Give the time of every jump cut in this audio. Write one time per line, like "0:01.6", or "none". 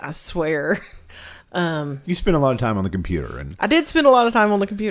0:01.4